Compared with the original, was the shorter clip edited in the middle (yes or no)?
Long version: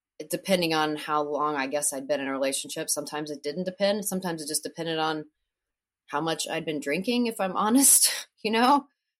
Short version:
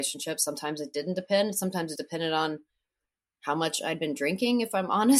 yes